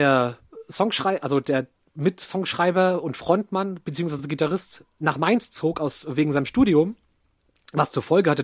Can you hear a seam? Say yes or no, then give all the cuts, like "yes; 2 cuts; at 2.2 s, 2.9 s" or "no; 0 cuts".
no; 0 cuts